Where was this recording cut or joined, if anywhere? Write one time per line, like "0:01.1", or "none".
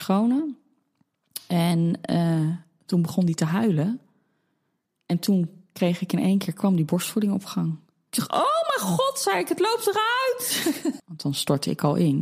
0:11.0